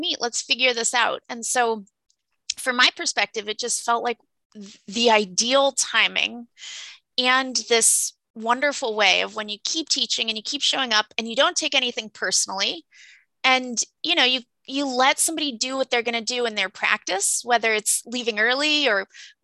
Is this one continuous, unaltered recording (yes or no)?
yes